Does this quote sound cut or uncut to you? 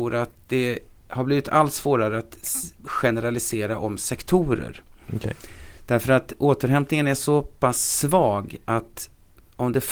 uncut